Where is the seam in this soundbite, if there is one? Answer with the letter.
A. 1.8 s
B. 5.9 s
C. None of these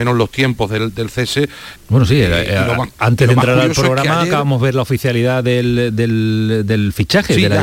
A